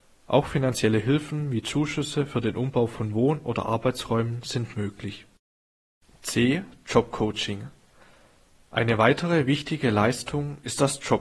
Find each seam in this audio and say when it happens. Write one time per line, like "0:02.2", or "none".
none

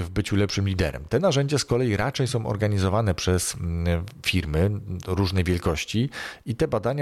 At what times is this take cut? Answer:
none

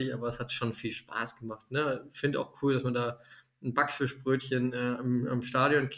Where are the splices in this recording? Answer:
none

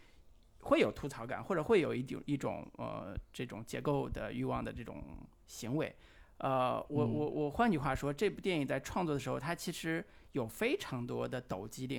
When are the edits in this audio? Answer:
none

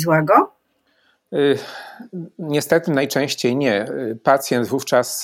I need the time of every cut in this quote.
none

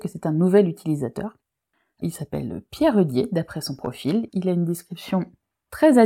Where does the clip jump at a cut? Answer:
0:04.3

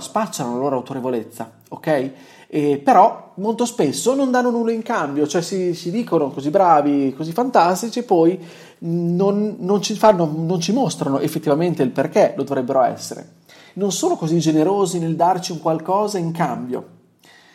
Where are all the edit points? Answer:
none

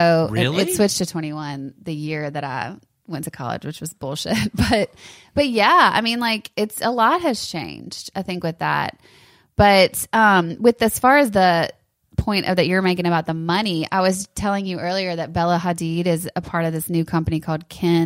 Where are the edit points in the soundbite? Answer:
none

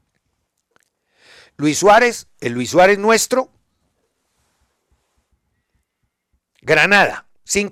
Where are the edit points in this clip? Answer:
none

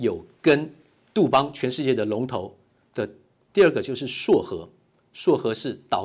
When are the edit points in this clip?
0:03.5

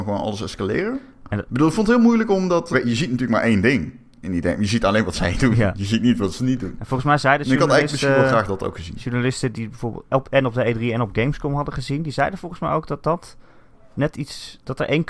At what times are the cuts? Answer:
0:02.7

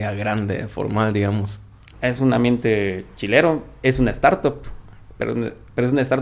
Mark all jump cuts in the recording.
0:01.9

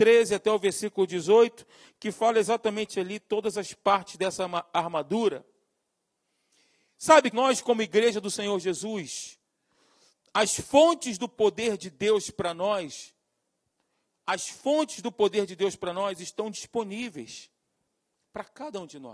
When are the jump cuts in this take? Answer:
0:07.3

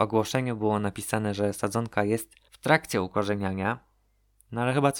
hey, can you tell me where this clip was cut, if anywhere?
0:02.5

